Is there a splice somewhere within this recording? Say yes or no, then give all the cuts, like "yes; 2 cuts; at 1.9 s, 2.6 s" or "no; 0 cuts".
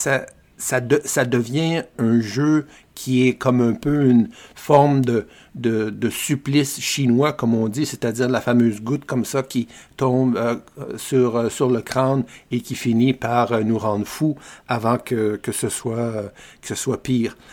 yes; 1 cut; at 1.9 s